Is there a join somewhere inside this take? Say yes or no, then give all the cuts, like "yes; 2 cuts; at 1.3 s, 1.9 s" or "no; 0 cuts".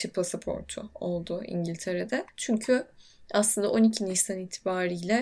no; 0 cuts